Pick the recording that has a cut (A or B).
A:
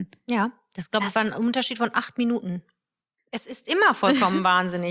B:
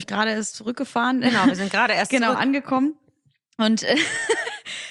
A